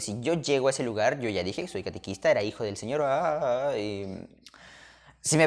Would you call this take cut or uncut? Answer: uncut